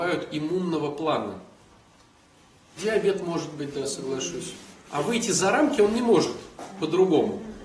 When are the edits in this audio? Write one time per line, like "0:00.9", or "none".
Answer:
0:02.8
0:04.7